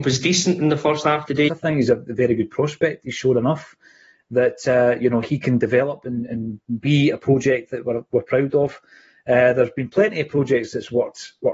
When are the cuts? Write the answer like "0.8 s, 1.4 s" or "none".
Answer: 1.5 s